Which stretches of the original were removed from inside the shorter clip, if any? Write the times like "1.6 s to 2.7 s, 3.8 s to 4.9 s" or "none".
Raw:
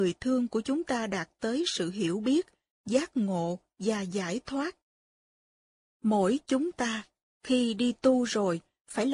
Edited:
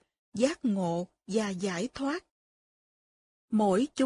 none

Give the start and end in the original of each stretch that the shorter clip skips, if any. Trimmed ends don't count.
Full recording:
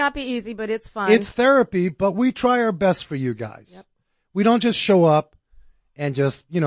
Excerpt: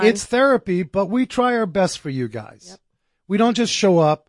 none

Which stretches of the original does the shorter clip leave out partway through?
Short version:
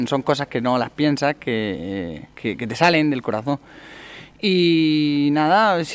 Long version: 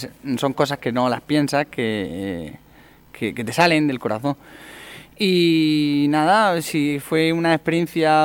2.6 s to 3.1 s

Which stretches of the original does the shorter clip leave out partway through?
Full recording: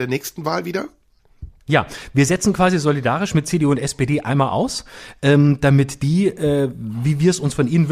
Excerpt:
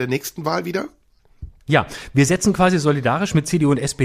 none

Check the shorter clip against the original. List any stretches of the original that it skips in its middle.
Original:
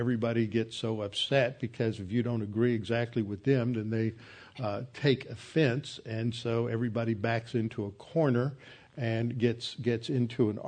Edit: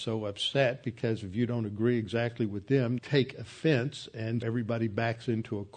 3.7 s to 4.9 s, 6.3 s to 6.7 s

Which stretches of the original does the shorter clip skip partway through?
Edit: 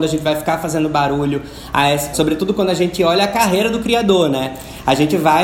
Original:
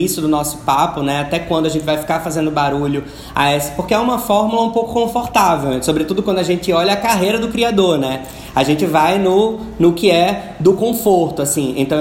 3.7 s to 5.8 s

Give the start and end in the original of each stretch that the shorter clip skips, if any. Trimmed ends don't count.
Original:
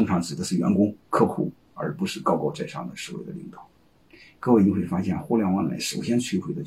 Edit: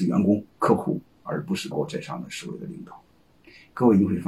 2.2 s to 2.4 s

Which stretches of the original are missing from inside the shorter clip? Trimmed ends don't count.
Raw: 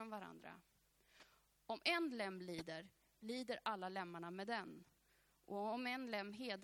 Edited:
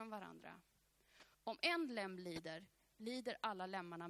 1.3 s to 1.6 s

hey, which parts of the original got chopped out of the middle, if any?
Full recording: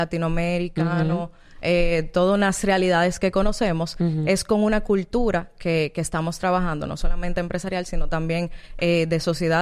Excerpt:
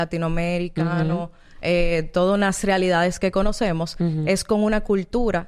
none

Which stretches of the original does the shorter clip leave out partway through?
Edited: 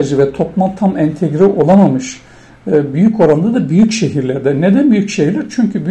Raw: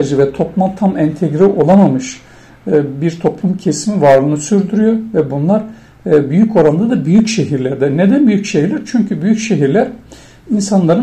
2.9 s to 6.3 s

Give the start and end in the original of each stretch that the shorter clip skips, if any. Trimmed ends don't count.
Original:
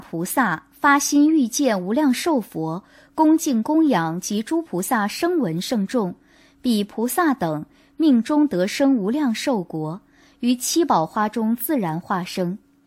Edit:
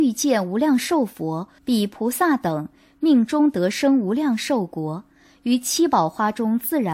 2.9 s to 6.5 s

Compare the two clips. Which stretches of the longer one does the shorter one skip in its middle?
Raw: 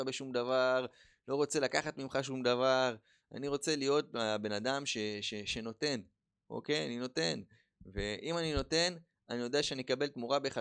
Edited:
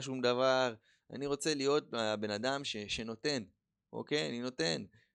4.8 s to 5.2 s

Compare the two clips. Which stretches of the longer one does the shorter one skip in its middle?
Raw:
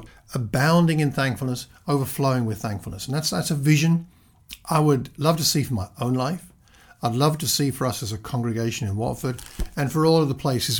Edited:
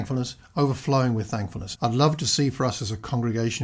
3.1 s to 7.0 s

